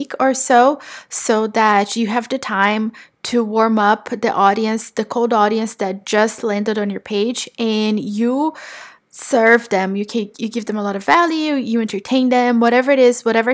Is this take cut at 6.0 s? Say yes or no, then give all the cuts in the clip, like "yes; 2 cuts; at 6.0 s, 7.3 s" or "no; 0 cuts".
no; 0 cuts